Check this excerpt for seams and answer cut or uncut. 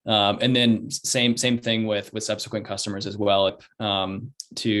cut